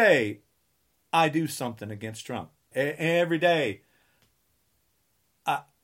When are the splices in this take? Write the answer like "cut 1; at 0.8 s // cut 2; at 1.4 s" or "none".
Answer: cut 1; at 2.7 s